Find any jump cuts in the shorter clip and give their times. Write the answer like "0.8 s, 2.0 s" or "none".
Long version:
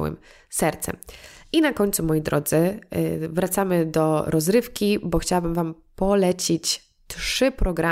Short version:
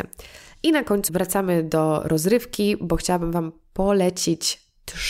1.1 s